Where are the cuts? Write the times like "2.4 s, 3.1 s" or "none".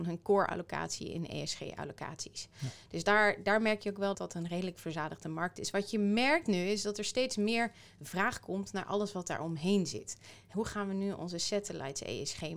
4.1 s